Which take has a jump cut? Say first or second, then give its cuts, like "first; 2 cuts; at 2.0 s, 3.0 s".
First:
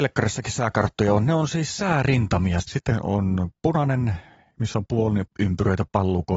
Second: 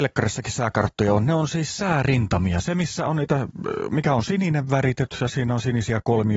first; 2 cuts; at 2.6 s, 5.3 s